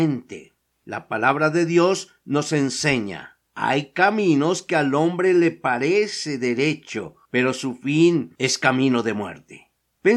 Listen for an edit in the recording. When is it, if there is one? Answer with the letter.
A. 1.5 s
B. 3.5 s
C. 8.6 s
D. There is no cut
B